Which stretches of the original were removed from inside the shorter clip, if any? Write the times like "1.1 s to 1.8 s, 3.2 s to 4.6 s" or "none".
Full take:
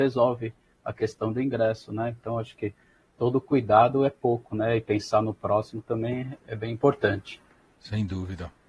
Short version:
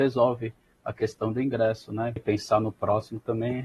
2.2 s to 4.8 s